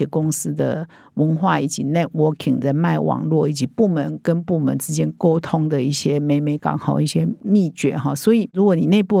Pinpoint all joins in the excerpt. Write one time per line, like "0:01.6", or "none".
0:06.6